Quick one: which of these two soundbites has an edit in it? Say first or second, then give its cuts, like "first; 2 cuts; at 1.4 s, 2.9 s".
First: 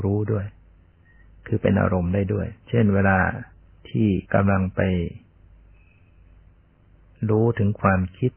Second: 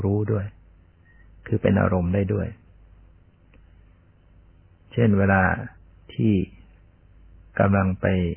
first; 2 cuts; at 2.6 s, 4.2 s